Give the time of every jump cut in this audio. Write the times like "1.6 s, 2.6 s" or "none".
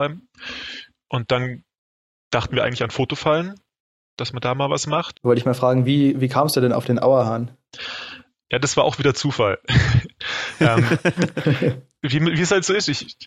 5.1 s